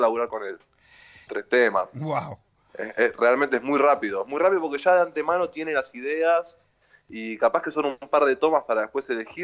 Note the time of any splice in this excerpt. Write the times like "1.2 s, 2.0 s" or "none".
1.3 s